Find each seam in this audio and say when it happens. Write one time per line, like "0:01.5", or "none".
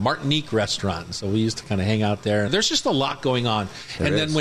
0:02.5

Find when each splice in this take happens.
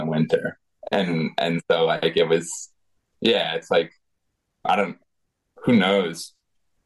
none

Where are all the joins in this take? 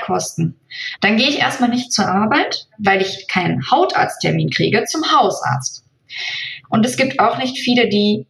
0:01.0
0:02.7
0:06.6

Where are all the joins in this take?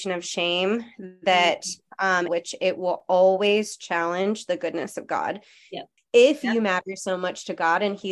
0:02.3
0:06.0

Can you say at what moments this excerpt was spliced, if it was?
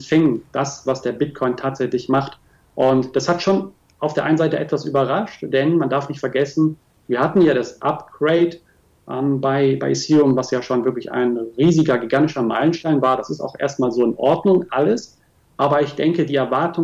none

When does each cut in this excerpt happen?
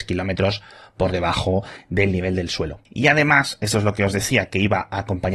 0:02.8

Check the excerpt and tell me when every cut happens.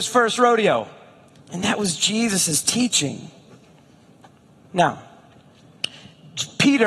0:01.4

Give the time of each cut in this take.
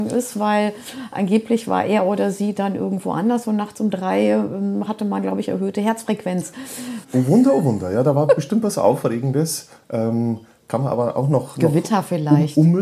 0:07.0

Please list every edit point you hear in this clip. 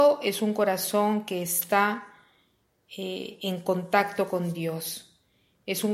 none

